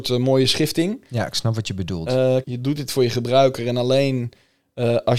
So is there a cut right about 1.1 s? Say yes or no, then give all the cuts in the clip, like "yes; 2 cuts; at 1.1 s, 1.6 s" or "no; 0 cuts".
no; 1 cut; at 2.4 s